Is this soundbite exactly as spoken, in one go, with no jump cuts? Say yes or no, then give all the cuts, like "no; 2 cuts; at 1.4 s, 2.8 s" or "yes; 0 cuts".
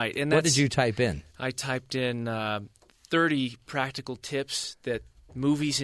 yes; 0 cuts